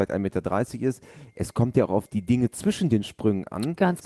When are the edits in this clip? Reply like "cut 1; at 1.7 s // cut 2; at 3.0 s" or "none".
none